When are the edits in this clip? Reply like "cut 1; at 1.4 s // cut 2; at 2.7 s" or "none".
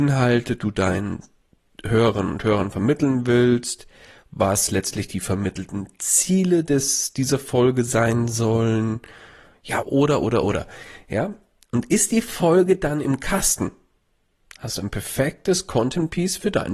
cut 1; at 9.8 s